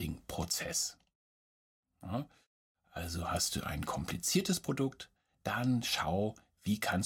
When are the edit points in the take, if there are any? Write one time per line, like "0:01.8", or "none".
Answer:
none